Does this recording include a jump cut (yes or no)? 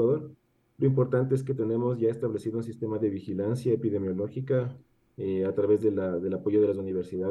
no